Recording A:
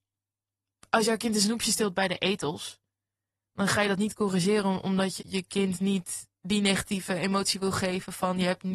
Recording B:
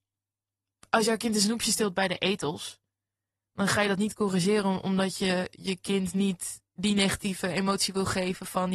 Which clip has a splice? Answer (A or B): A